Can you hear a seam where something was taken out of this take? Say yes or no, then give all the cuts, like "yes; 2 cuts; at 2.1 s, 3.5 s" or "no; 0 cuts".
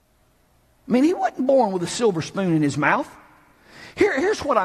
no; 0 cuts